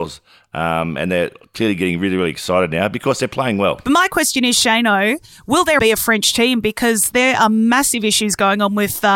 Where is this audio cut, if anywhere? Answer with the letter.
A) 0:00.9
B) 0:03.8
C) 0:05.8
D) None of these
C